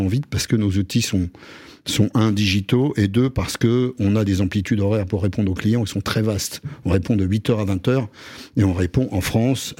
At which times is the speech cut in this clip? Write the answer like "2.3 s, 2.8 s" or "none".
none

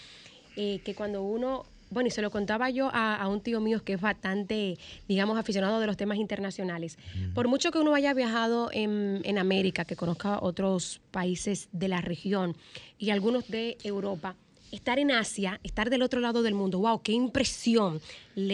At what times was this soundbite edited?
none

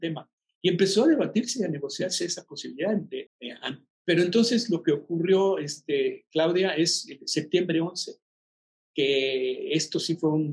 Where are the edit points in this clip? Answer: 3.3 s

